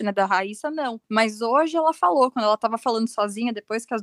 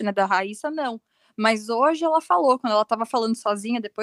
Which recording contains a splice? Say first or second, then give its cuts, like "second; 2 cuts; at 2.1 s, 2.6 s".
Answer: first; 1 cut; at 1.0 s